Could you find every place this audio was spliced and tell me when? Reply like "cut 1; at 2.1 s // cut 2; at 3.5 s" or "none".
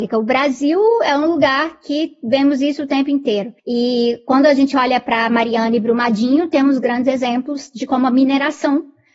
cut 1; at 3.6 s

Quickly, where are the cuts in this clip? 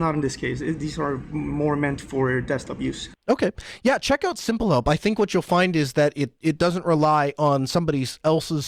cut 1; at 3.2 s

